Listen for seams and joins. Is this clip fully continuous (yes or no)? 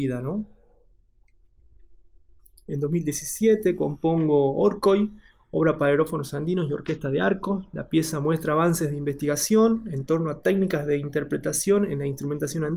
yes